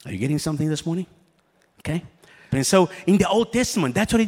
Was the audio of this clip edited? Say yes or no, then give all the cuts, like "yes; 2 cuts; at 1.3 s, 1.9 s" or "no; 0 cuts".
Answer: yes; 1 cut; at 2.5 s